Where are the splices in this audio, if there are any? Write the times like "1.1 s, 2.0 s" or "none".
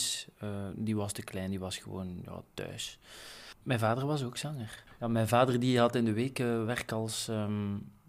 none